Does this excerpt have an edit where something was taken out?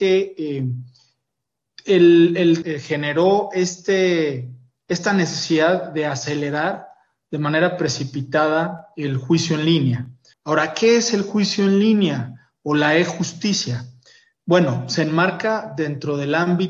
yes; 2 cuts; at 2.6 s, 10.3 s

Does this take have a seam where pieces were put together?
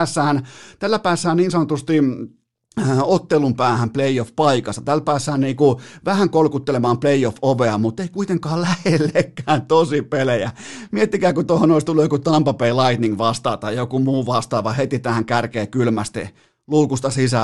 no; 0 cuts

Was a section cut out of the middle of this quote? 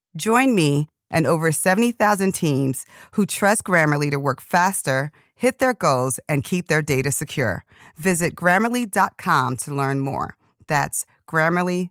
no; 0 cuts

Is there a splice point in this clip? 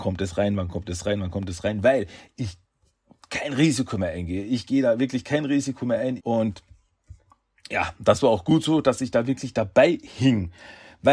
yes; 1 cut; at 6.2 s

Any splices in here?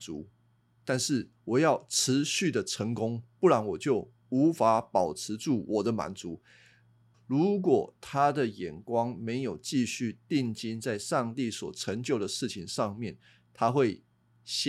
yes; 1 cut; at 7.1 s

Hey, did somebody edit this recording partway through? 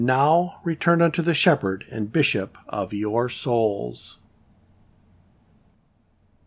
no; 0 cuts

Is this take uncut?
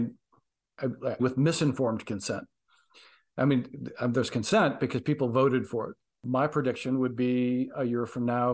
no; 1 cut; at 1.2 s

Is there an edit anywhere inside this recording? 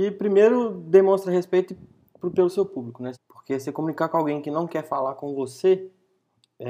yes; 1 cut; at 3.1 s

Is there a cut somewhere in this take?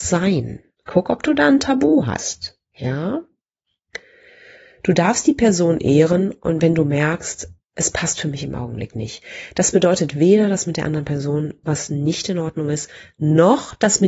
yes; 1 cut; at 2.6 s

